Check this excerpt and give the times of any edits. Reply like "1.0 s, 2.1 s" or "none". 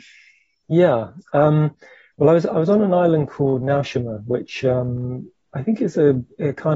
none